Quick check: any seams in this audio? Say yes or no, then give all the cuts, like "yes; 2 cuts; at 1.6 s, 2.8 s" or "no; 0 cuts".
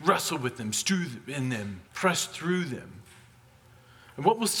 yes; 1 cut; at 1.9 s